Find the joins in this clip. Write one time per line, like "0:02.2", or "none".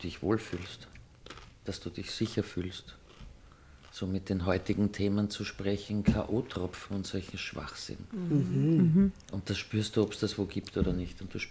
none